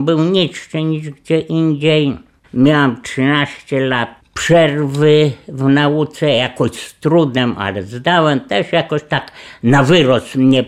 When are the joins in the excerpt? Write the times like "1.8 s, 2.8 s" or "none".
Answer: 2.4 s

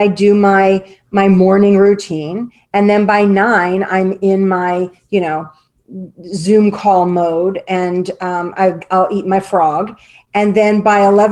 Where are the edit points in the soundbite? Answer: none

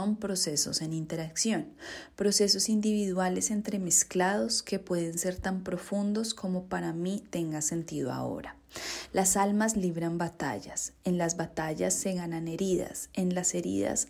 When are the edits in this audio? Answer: none

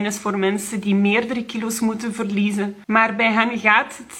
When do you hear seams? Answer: 2.8 s

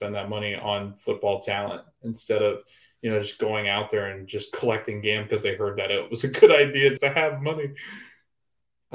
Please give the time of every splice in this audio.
7.0 s

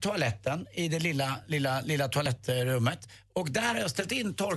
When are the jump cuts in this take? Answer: none

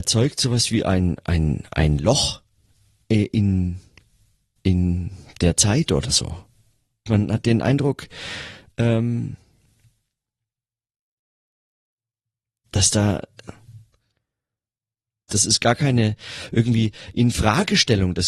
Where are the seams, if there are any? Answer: 7.1 s, 15.3 s

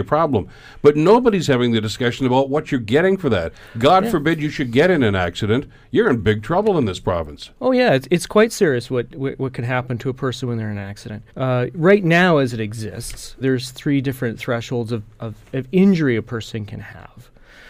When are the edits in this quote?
11.3 s, 13.4 s

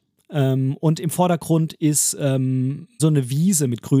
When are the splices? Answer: 3.0 s

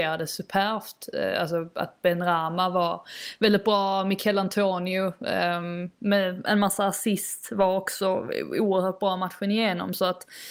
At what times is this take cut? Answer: none

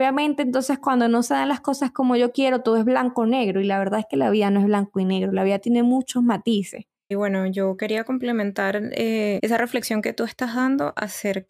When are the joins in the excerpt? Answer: 7.1 s, 9.4 s

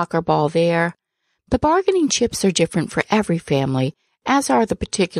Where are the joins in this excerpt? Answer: none

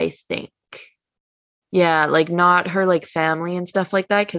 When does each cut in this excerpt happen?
1.6 s

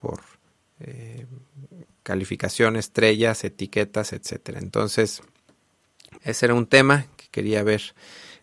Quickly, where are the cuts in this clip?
6.2 s

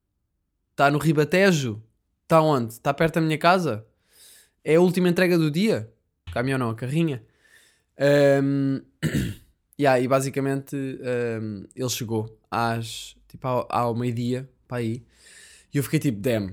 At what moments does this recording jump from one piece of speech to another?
6.3 s

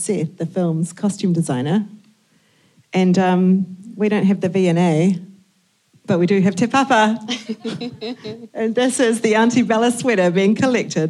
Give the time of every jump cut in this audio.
none

